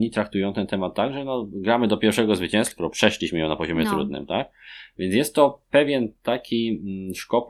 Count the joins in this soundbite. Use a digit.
1